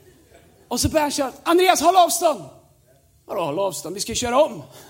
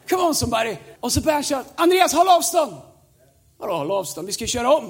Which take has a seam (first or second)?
second